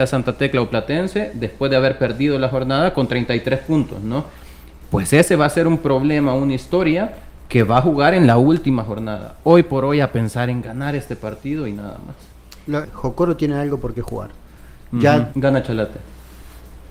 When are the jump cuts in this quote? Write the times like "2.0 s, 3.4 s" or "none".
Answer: 12.8 s, 15.3 s